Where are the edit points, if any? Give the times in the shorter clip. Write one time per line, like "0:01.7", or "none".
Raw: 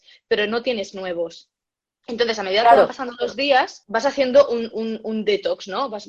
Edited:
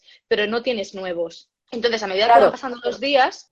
0:01.6